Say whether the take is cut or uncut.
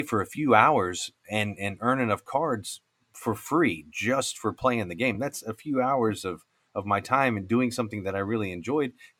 uncut